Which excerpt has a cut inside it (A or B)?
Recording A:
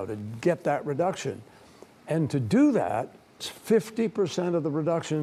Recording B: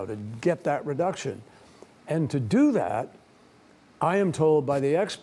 A